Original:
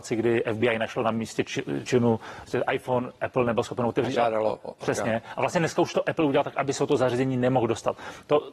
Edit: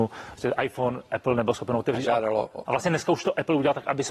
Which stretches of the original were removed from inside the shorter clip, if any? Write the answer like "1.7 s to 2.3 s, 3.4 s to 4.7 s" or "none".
4.8 s to 5.4 s